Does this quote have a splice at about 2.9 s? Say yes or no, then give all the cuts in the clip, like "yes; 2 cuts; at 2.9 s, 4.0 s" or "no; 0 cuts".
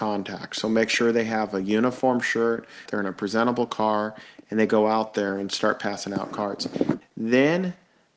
yes; 2 cuts; at 2.9 s, 7.0 s